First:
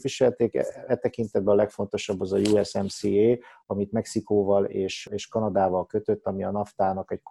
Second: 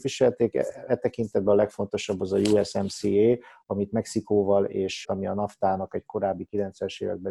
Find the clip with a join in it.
second; 1 cut; at 5.0 s

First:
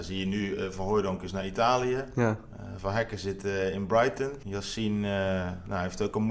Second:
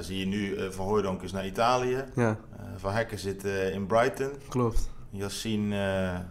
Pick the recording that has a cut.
first; 1 cut; at 4.4 s

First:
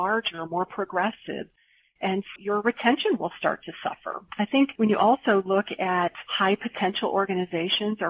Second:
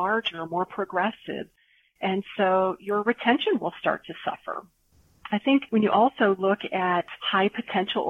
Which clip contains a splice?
first; 2 cuts; at 2.4 s, 4.3 s

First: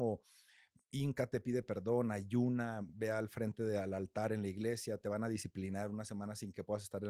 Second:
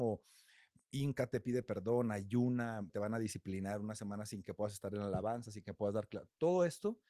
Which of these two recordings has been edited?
second; 1 cut; at 2.9 s

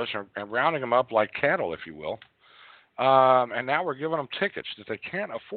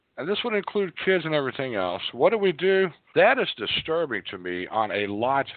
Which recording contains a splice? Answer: second; 1 cut; at 3.1 s

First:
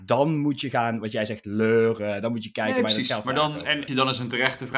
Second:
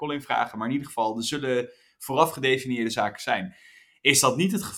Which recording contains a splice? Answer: first; 1 cut; at 3.9 s

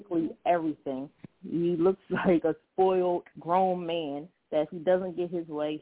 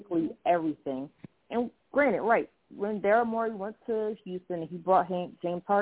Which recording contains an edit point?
first; 2 cuts; at 1.4 s, 3.3 s

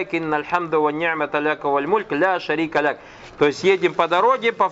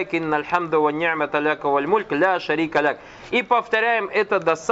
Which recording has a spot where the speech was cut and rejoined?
first; 1 cut; at 3.3 s

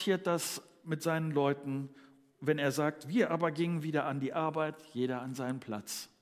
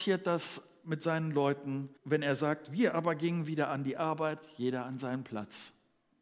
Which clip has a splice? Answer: second; 1 cut; at 2.0 s

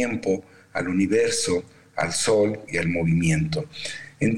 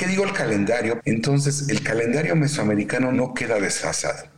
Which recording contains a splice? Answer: second; 1 cut; at 1.0 s

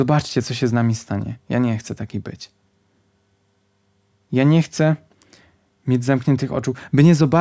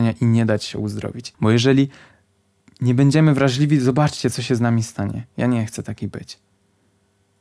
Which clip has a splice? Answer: second; 1 cut; at 1.3 s

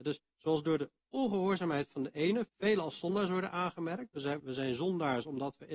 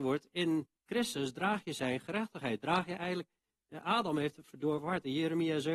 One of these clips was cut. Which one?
first; 2 cuts; at 2.5 s, 4.4 s

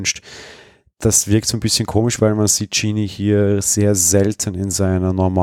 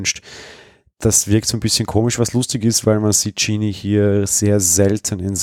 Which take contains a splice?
first; 1 cut; at 2.2 s

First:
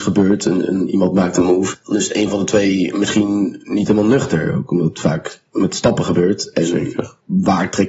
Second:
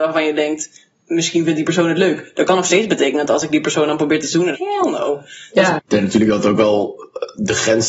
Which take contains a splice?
second; 2 cuts; at 4.5 s, 5.8 s

